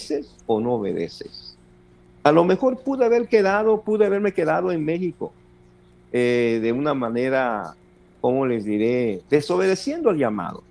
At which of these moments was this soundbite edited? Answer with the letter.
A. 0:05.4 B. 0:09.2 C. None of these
B